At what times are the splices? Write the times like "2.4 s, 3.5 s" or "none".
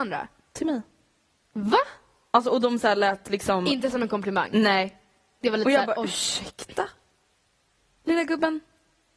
none